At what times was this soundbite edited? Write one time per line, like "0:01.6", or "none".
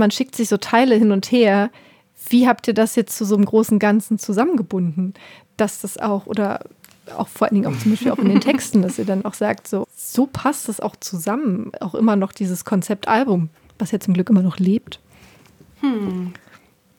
0:09.8